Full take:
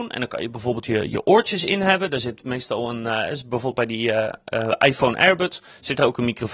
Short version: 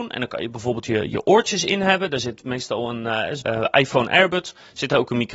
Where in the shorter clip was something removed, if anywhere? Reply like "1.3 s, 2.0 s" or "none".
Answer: 3.4 s